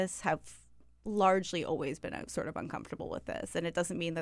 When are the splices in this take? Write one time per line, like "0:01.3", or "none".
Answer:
none